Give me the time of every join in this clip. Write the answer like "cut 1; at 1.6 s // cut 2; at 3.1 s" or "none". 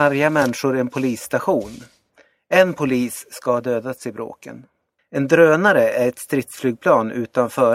cut 1; at 5.0 s